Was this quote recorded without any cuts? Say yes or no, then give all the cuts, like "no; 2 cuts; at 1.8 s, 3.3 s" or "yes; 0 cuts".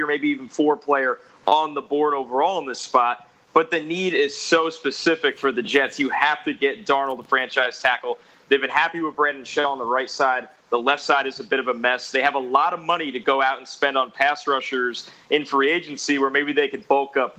yes; 0 cuts